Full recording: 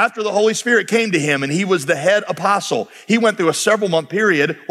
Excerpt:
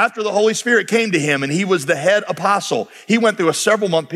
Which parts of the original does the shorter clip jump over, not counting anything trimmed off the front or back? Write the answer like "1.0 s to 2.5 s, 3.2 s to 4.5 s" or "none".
none